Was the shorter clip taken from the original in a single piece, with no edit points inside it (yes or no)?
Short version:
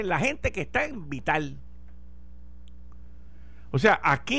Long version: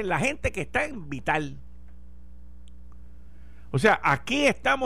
yes